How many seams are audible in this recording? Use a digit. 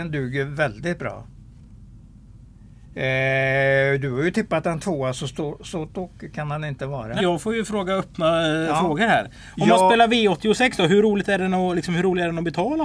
1